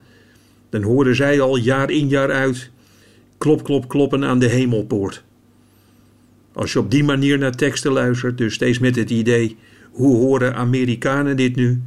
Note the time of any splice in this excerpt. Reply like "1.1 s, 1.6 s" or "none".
none